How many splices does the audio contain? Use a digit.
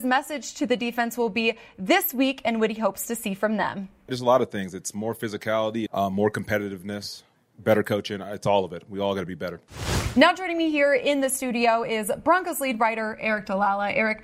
1